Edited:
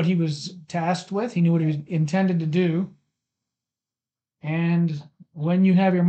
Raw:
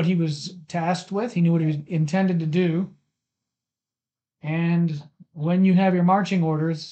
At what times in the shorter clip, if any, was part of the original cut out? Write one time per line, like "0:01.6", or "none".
none